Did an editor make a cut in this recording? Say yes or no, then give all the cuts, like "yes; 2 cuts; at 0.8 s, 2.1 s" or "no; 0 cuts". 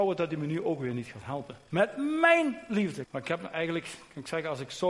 yes; 2 cuts; at 1.7 s, 3.0 s